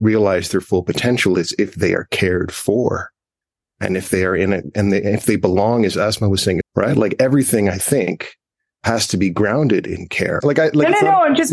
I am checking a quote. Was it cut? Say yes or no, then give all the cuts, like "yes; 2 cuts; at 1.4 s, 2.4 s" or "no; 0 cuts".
yes; 2 cuts; at 6.6 s, 10.4 s